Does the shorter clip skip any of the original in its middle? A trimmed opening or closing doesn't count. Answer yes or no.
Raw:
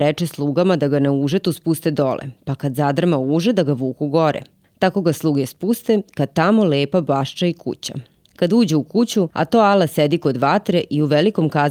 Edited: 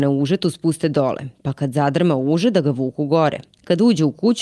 yes